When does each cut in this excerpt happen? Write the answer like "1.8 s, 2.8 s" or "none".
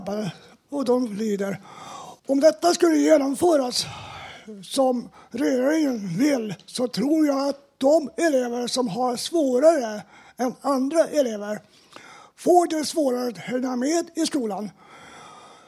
2.2 s